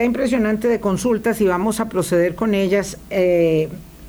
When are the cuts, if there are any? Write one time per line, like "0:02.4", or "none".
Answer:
none